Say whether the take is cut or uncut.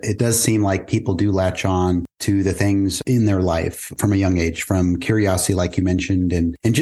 uncut